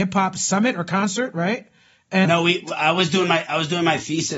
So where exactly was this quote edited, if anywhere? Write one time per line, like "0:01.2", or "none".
0:02.2